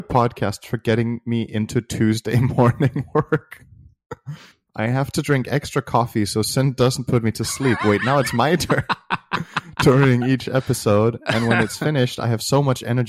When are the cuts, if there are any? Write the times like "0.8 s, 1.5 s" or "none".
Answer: none